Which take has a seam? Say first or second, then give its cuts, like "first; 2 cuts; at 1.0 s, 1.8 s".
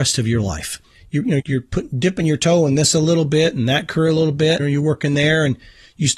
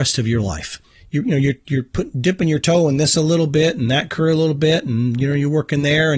first; 2 cuts; at 1.4 s, 4.6 s